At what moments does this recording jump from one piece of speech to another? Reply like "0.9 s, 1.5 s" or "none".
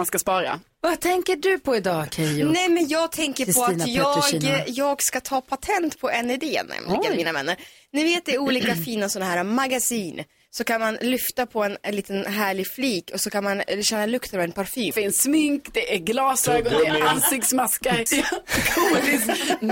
14.9 s, 18.1 s